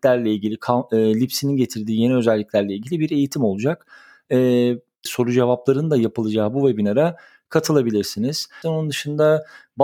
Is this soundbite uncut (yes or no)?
no